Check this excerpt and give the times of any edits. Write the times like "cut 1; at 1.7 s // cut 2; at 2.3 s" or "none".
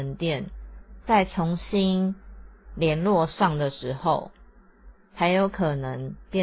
cut 1; at 1.0 s